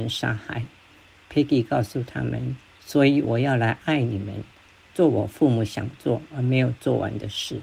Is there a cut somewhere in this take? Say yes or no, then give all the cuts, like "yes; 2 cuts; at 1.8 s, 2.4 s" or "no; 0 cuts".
no; 0 cuts